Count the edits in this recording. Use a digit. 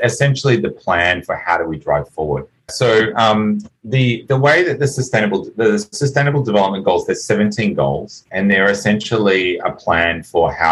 1